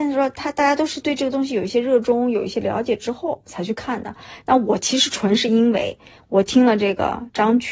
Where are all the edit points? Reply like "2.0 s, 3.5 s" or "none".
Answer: none

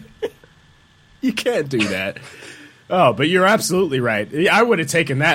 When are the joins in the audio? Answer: none

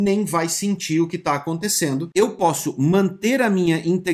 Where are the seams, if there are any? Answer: 2.1 s

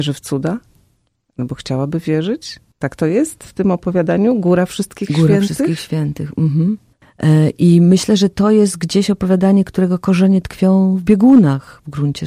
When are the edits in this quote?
7.0 s

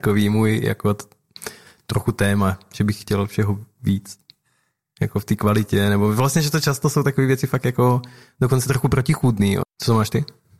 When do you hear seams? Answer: 9.6 s

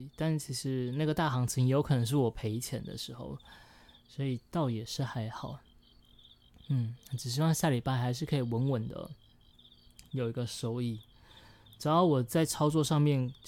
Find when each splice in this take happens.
none

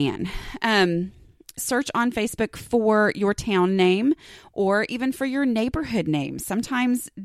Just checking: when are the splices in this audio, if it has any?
1.6 s

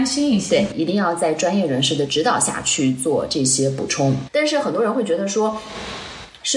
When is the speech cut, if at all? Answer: 4.3 s

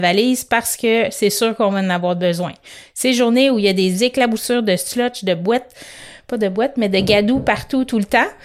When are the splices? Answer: none

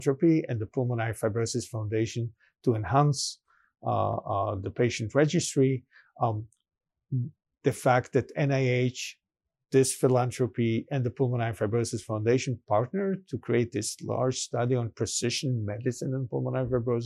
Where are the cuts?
none

